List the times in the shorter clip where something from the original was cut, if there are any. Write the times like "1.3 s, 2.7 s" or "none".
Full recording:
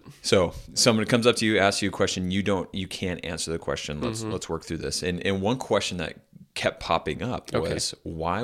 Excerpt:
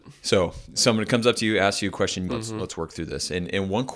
2.3 s